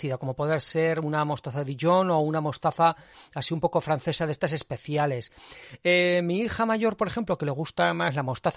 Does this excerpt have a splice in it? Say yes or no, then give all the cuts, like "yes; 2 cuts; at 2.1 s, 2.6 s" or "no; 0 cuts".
no; 0 cuts